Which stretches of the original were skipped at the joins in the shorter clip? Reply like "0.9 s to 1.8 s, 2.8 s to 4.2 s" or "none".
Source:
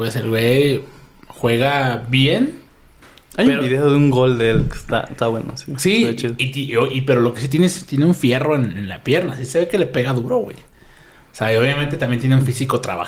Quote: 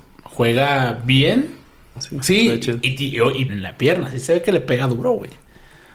3.0 s to 5.5 s, 7.0 s to 8.7 s

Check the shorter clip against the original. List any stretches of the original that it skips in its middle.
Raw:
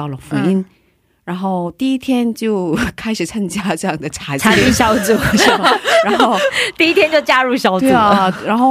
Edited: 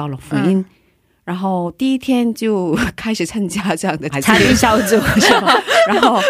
4.1 s to 4.3 s

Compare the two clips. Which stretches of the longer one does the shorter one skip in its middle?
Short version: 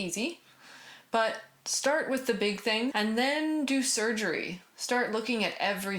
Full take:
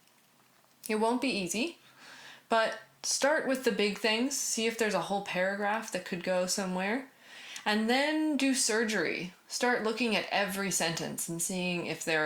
4.3 s to 7.6 s

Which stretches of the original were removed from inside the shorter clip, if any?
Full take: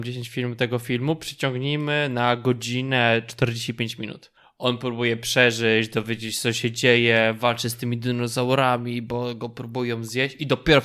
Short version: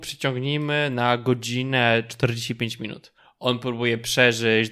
none

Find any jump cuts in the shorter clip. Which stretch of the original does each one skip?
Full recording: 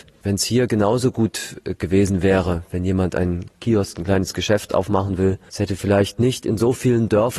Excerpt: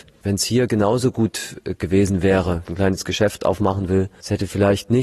2.6 s to 3.9 s

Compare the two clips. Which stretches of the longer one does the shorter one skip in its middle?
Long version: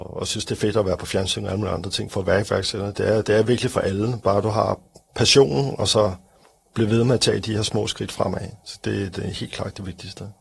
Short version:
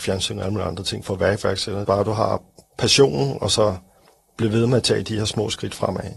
2.9 s to 4.2 s

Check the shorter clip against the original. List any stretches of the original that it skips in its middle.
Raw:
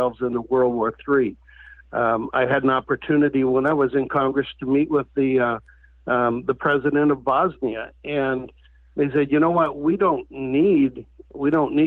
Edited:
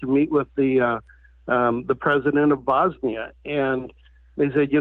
none

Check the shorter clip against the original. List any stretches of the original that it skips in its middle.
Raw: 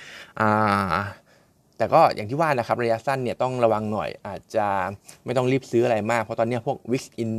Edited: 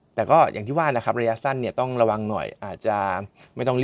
4.4 s to 4.5 s

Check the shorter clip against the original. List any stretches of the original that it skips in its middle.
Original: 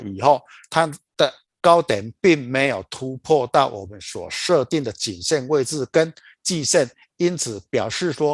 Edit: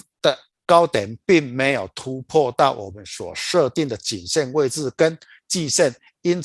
none

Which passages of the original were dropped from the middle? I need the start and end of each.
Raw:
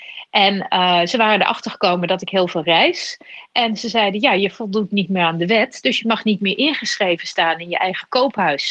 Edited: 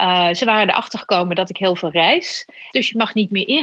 3.4 s to 5.8 s

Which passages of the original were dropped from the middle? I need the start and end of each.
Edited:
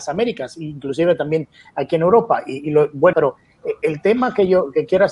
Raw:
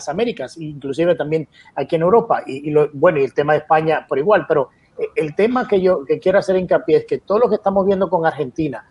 3.1 s to 4.5 s

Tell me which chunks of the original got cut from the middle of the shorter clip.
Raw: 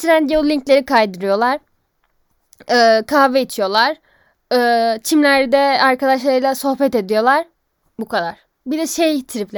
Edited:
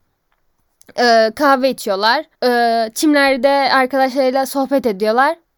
4.1 s to 4.4 s

